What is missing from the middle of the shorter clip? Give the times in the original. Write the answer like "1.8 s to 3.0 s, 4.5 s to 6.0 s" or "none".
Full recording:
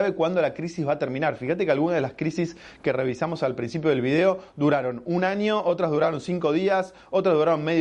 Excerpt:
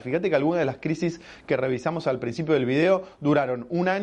none